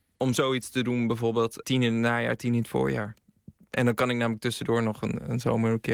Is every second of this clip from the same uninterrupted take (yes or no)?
no